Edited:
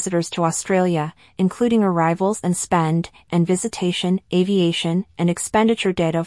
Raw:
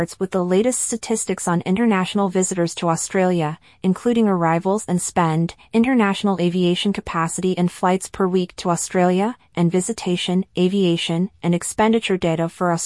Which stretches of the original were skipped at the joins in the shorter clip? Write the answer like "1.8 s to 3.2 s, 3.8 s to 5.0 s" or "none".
5.7 s to 9.5 s

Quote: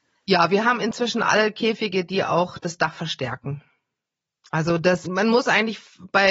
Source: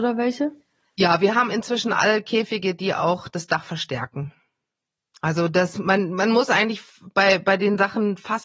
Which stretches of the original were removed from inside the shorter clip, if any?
5.8 s to 6.1 s

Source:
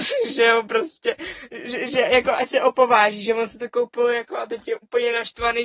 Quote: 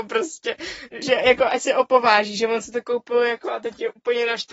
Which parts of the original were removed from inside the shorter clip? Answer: 1.6 s to 1.9 s

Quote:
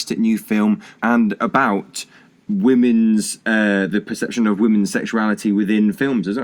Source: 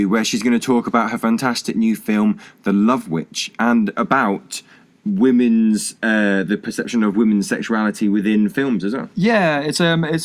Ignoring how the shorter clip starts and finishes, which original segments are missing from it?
2.6 s to 3.6 s

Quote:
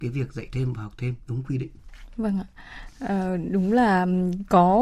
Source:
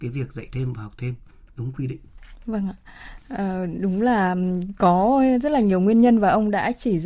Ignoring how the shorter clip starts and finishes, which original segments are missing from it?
1.2 s to 1.5 s

